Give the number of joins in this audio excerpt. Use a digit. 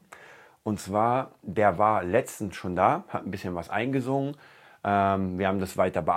0